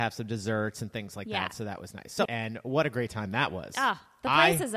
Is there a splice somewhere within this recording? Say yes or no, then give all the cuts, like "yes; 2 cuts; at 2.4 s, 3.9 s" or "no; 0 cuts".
yes; 1 cut; at 2.3 s